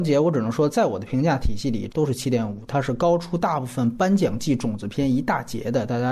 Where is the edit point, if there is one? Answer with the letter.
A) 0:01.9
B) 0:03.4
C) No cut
A